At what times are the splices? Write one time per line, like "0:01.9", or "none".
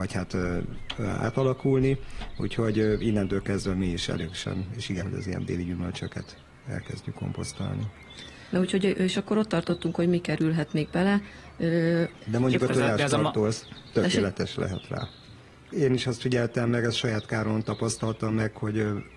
0:05.0
0:12.1
0:15.7